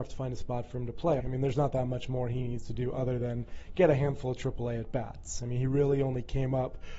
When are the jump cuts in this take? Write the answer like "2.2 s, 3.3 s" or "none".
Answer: 1.2 s